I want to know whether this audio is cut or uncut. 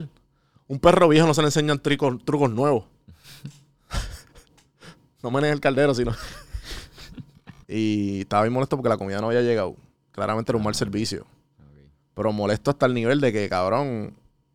cut